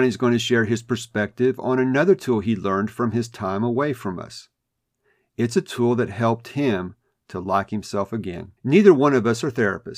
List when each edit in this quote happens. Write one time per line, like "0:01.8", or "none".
0:08.6